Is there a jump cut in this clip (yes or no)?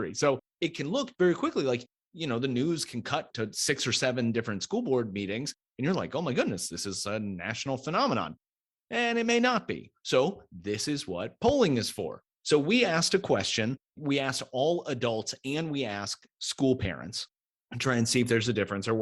no